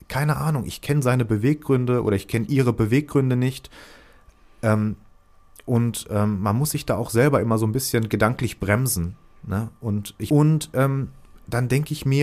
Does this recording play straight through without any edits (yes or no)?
no